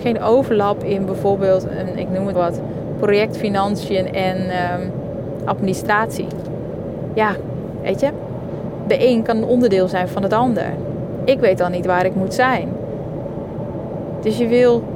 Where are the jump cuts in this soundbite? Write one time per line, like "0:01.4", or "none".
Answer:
0:02.3